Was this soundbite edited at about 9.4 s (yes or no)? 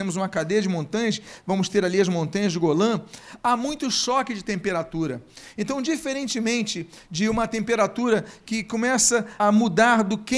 yes